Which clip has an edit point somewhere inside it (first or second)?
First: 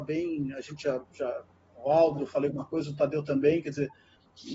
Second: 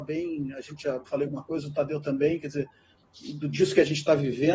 second